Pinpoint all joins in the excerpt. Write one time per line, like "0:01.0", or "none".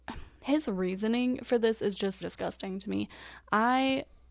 0:02.2